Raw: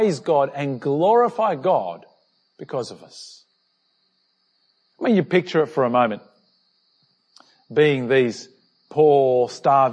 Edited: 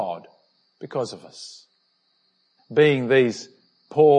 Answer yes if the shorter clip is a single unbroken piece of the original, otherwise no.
no